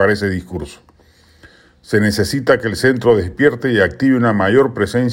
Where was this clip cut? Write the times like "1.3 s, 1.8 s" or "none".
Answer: none